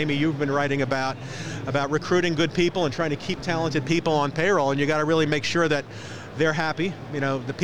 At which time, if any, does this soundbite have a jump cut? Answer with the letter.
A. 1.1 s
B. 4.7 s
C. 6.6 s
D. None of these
D